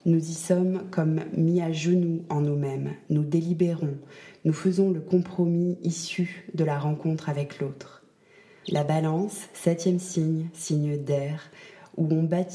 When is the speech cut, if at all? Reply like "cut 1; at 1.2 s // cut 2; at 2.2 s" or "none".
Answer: cut 1; at 8.6 s